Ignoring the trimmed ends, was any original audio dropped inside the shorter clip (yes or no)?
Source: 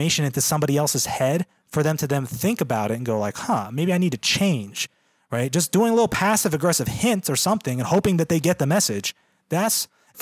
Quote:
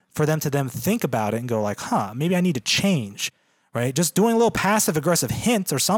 no